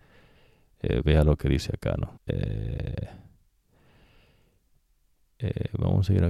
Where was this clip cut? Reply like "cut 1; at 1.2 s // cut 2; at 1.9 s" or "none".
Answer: cut 1; at 2.2 s